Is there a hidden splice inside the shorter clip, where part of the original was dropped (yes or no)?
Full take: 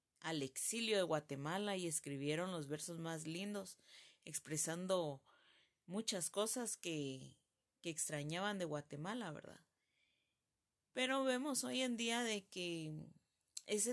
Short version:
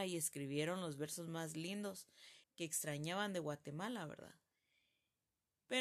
yes